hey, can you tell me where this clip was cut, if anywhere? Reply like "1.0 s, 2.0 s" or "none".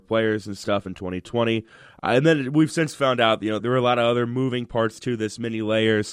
3.6 s